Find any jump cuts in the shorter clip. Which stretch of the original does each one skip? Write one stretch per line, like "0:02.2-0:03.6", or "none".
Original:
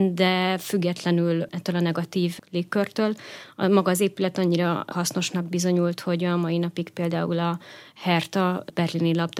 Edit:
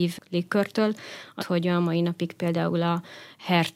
0:03.6-0:06.0